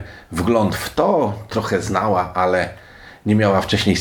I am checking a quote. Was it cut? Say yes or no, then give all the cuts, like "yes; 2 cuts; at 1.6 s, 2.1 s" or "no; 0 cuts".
yes; 1 cut; at 1.5 s